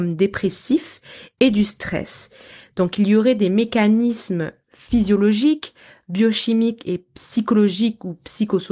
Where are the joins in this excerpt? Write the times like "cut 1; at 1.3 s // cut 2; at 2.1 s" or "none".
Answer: none